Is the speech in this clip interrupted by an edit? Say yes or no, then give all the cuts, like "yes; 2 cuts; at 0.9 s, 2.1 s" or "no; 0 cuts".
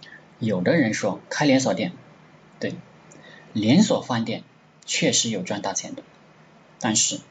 no; 0 cuts